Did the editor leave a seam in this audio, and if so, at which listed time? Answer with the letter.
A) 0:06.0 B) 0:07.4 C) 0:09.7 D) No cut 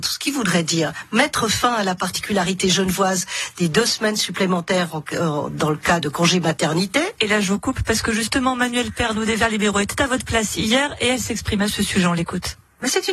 A